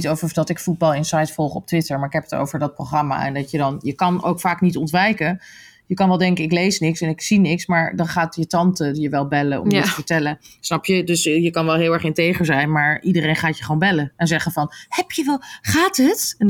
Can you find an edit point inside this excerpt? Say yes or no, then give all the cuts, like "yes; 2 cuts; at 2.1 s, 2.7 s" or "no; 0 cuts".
no; 0 cuts